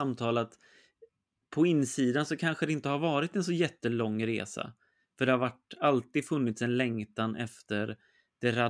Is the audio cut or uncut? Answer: uncut